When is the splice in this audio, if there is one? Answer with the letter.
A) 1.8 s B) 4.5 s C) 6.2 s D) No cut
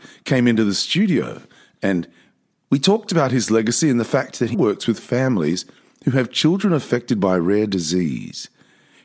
B